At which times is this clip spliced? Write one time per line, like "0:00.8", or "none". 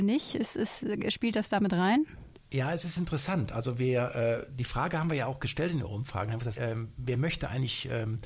0:06.5